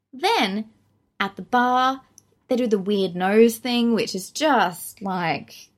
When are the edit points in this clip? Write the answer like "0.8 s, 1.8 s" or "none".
none